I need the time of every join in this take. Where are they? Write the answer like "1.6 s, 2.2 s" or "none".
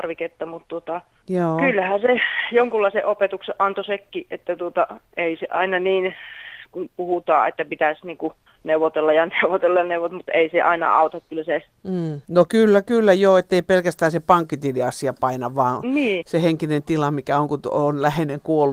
12.3 s